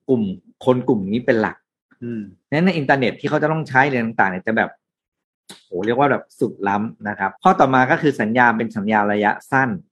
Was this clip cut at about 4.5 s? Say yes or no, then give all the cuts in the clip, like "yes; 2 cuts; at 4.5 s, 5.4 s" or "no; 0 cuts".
no; 1 cut; at 7.4 s